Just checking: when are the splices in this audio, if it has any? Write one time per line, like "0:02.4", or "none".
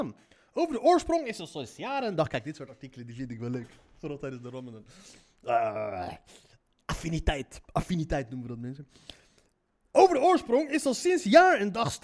none